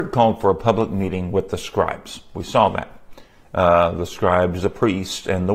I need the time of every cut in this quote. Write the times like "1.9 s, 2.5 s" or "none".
none